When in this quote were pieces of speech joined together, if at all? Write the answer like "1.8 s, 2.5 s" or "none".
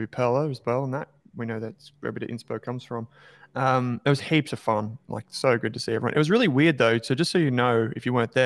none